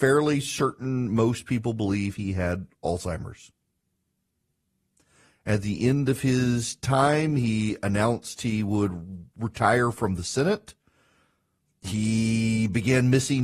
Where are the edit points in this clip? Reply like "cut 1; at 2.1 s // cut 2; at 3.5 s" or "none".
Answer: none